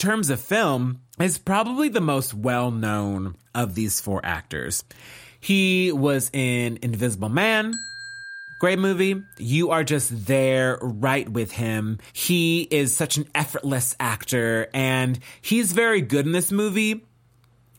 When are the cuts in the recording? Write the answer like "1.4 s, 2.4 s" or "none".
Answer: 9.4 s, 12.1 s